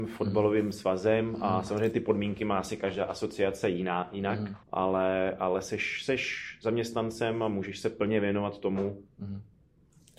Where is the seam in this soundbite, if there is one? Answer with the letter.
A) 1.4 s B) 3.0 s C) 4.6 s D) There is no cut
C